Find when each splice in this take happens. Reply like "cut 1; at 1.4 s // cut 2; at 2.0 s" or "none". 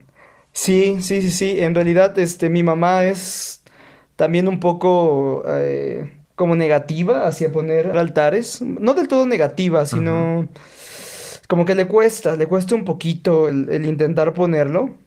cut 1; at 6.2 s // cut 2; at 7.9 s // cut 3; at 13.5 s

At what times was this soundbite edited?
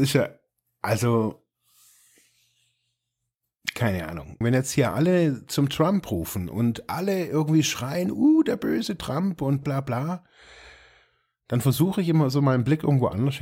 cut 1; at 4.4 s // cut 2; at 9.6 s

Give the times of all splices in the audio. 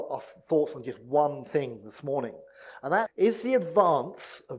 cut 1; at 3.1 s

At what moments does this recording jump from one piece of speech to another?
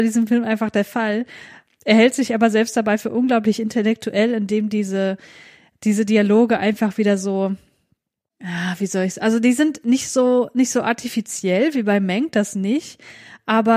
none

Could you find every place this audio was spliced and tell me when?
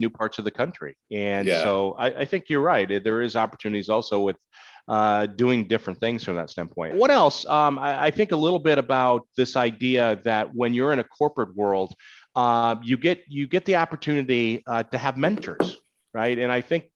cut 1; at 6.9 s

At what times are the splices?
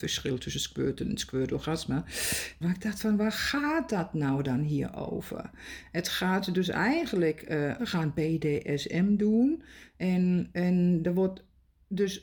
cut 1; at 2.6 s // cut 2; at 7.8 s

